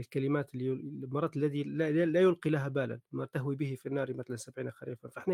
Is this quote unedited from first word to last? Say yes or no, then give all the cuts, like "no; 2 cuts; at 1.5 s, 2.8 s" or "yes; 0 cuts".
no; 1 cut; at 3.1 s